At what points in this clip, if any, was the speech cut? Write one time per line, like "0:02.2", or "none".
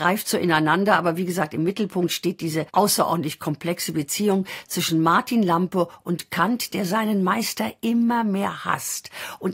0:02.7

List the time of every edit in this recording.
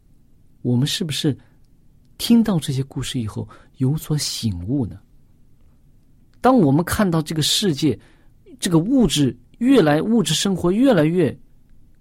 0:06.3
0:09.4

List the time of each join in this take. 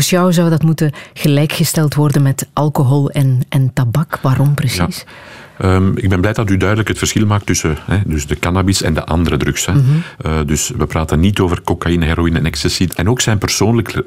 0:12.9

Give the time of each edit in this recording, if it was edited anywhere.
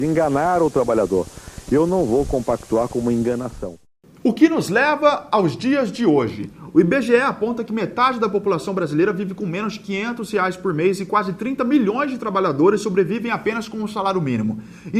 none

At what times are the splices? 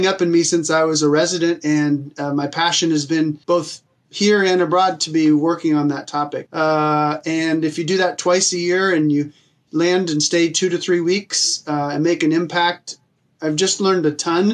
0:03.4
0:06.5

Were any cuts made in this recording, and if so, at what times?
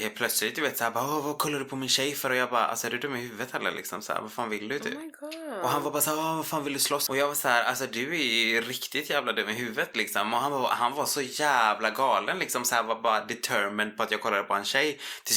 0:07.1

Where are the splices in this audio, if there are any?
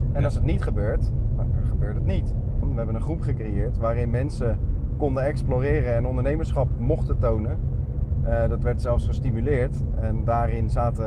0:02.6

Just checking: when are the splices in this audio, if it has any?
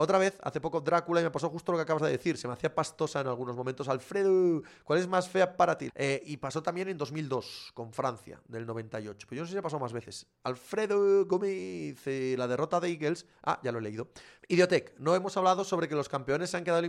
0:05.9
0:14.4

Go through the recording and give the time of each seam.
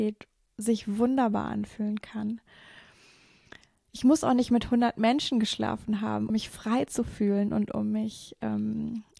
0:06.3

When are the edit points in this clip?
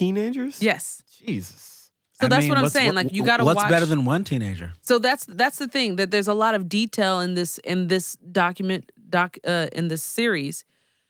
none

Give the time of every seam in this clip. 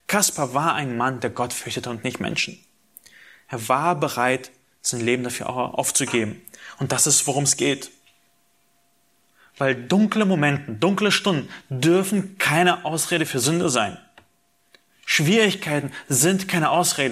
none

